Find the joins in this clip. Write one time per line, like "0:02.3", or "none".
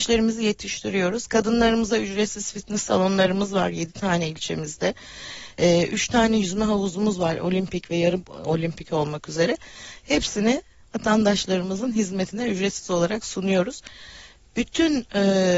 none